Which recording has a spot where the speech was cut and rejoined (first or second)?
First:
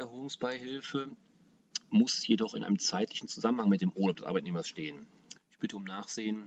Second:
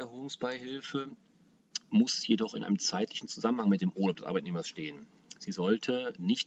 first